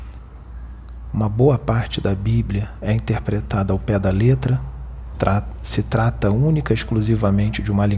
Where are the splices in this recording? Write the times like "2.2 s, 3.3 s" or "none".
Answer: 5.1 s